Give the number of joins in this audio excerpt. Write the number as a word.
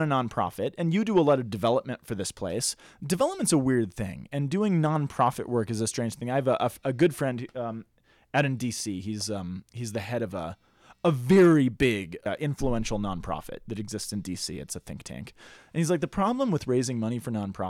two